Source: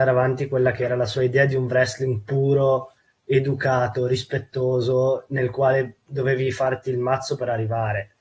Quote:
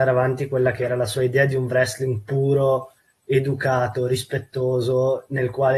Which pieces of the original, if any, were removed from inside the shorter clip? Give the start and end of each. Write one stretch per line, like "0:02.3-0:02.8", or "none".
none